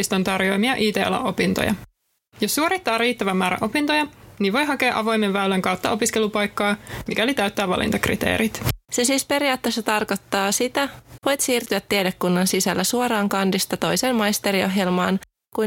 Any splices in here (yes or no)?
yes